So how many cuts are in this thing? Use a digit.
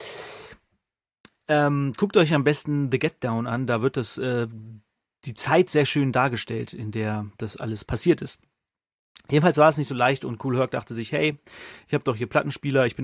0